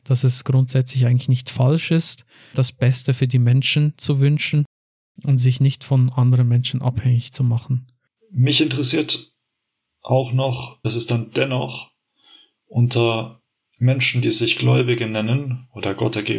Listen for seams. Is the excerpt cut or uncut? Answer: cut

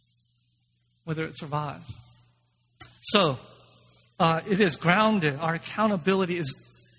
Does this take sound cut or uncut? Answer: uncut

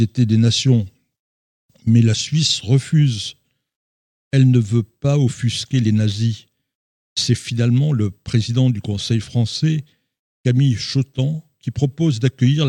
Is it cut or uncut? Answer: uncut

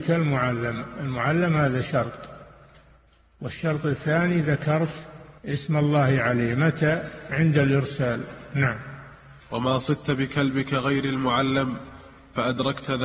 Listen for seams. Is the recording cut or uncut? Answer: cut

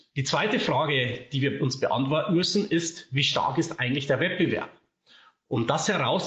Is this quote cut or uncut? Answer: uncut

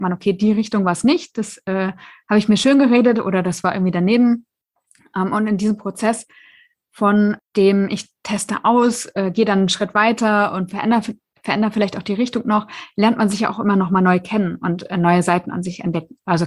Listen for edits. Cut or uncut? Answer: uncut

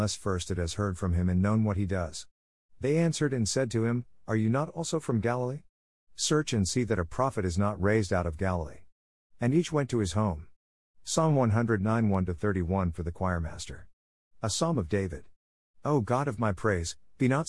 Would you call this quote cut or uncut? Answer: uncut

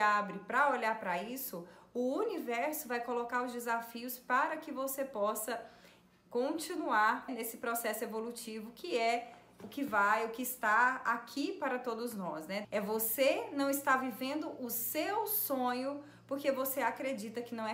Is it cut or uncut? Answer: cut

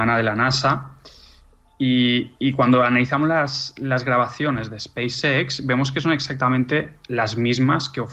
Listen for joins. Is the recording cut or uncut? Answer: uncut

